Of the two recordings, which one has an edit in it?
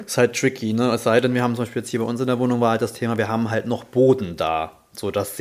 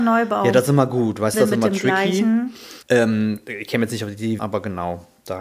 second; 3 cuts; at 1.3 s, 2.8 s, 4.4 s

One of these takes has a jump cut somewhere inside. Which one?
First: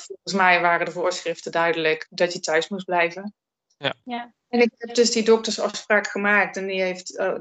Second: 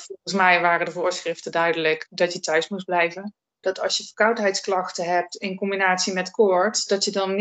second; 1 cut; at 3.6 s

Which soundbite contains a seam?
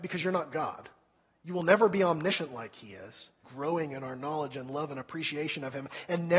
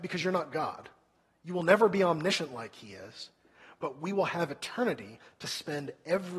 first; 1 cut; at 3.4 s

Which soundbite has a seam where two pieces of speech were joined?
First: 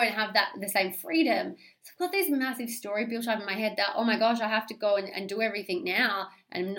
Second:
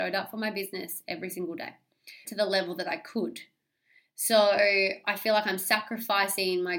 second; 1 cut; at 2.2 s

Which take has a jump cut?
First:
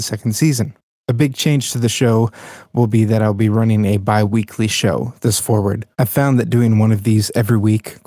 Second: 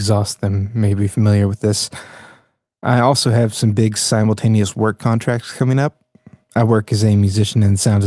first; 1 cut; at 5.9 s

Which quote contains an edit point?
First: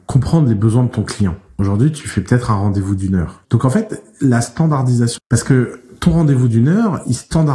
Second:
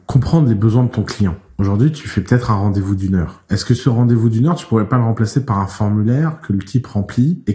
first; 2 cuts; at 3.4 s, 5.2 s

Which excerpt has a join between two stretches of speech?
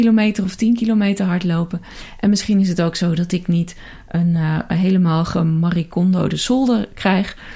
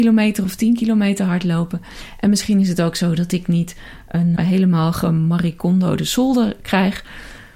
second; 1 cut; at 4.4 s

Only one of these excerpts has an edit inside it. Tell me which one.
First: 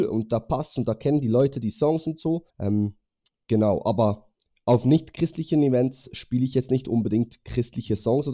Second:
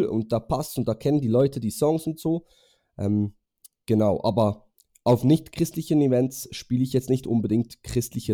first; 1 cut; at 2.5 s

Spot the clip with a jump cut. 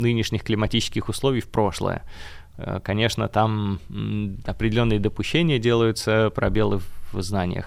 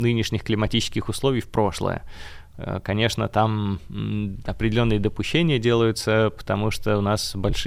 first; 1 cut; at 6.3 s

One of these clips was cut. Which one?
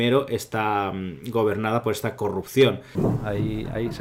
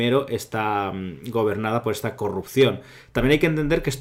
first; 1 cut; at 2.9 s

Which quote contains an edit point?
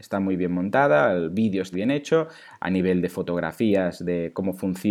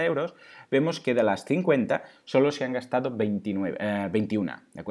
first; 1 cut; at 1.7 s

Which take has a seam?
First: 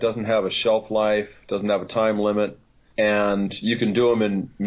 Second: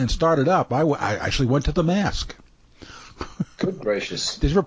first; 1 cut; at 2.9 s

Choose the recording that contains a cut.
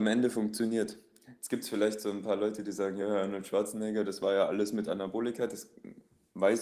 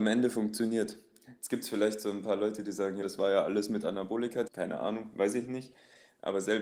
second; 2 cuts; at 3.0 s, 4.5 s

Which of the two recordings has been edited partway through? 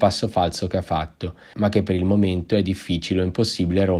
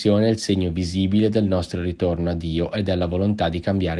first; 1 cut; at 1.5 s

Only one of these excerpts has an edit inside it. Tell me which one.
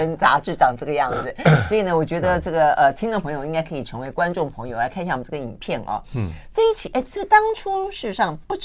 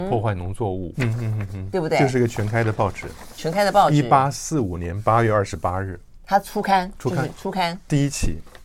second; 1 cut; at 0.9 s

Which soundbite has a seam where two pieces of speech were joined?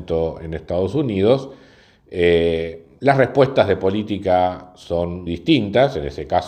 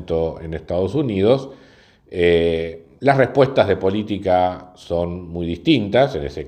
first; 1 cut; at 5.3 s

